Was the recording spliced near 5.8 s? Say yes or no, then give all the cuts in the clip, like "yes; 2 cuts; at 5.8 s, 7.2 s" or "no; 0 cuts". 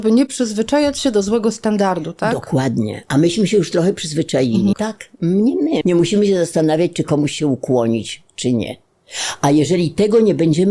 yes; 2 cuts; at 4.7 s, 5.8 s